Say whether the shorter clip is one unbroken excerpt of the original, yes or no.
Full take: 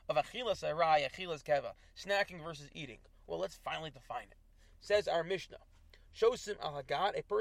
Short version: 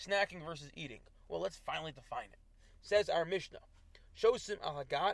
yes